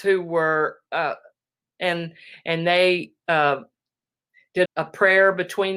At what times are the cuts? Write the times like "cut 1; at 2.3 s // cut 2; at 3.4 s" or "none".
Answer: cut 1; at 1.6 s // cut 2; at 4.6 s